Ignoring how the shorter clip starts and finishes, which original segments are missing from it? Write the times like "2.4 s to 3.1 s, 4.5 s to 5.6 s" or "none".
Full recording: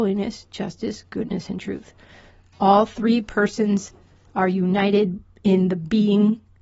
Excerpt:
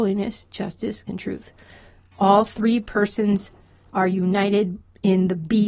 1.1 s to 1.5 s